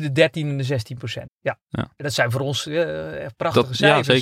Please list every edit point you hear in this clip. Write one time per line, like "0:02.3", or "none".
0:01.3

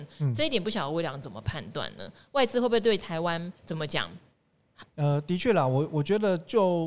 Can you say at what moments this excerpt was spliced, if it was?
0:03.6
0:04.8

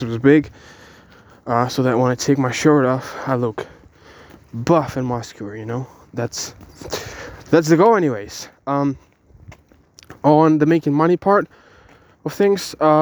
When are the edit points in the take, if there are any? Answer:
none

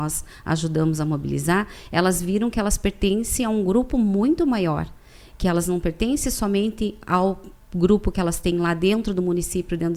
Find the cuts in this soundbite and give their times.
none

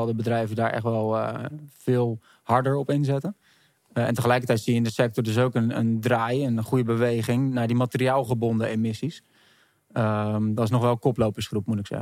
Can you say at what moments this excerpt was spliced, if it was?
none

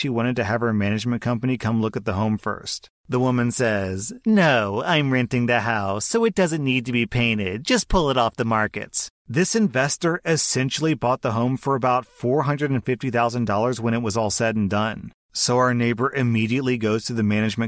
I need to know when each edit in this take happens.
none

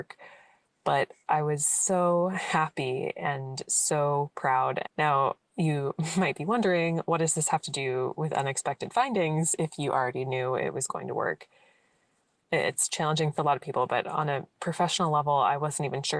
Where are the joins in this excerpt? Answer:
0:04.8
0:12.4

